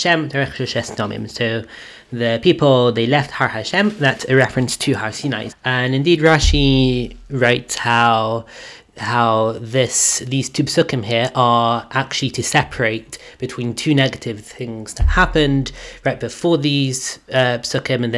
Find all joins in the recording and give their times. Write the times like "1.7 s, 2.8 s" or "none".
5.5 s